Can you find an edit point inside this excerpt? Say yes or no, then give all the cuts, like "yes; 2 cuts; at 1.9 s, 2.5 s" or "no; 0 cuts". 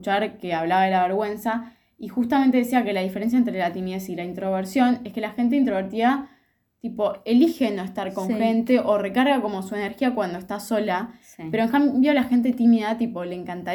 no; 0 cuts